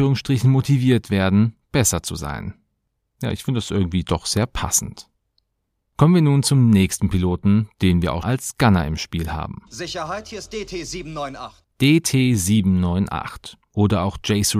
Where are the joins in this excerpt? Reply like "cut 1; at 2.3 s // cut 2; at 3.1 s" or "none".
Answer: cut 1; at 8.2 s